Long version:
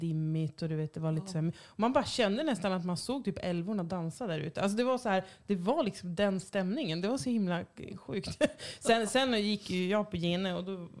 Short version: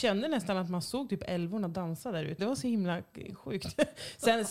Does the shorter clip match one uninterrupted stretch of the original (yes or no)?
no